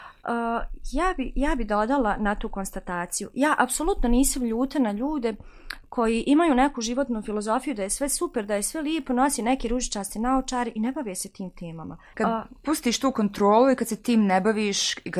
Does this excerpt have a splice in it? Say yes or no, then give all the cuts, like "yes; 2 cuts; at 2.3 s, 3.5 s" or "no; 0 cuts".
yes; 1 cut; at 12.1 s